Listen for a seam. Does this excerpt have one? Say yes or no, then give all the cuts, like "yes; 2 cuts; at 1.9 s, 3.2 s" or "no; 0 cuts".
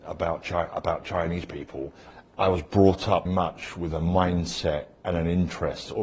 yes; 2 cuts; at 2.2 s, 3.3 s